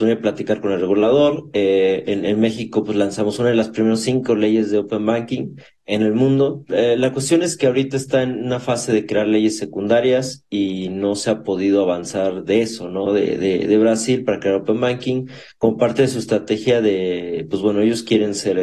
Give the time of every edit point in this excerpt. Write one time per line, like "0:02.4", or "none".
0:06.7
0:13.1